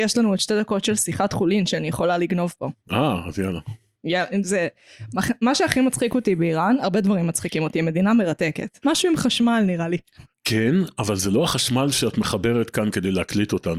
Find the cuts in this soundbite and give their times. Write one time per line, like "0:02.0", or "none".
0:08.8
0:10.3